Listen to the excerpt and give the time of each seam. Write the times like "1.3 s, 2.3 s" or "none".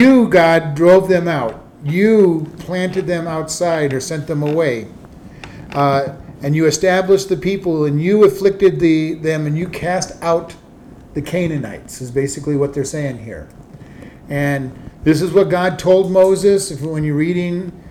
2.6 s